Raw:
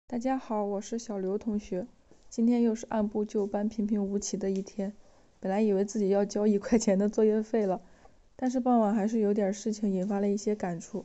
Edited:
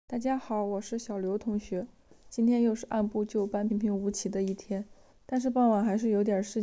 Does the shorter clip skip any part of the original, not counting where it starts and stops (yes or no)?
yes